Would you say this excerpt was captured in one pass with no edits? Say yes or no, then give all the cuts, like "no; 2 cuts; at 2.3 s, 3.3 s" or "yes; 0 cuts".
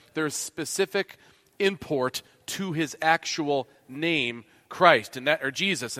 yes; 0 cuts